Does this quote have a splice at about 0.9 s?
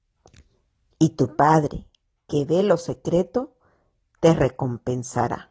no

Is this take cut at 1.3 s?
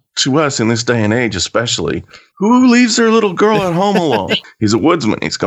no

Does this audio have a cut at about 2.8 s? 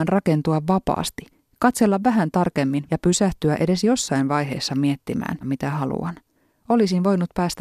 yes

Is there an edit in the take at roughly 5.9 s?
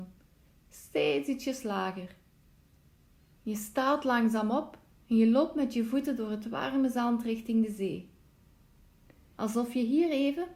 no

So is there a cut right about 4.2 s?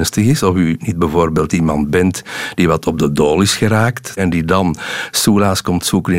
yes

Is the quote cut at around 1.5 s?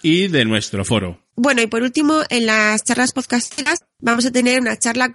no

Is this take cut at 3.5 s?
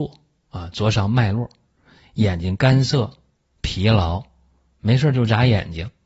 no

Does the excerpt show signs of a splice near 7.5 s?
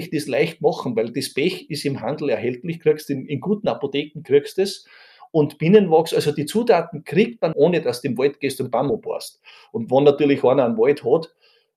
yes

